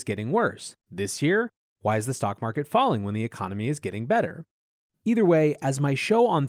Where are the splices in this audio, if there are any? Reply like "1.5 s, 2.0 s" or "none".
none